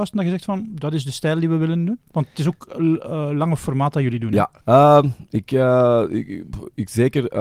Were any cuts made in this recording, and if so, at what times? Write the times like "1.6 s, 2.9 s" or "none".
4.6 s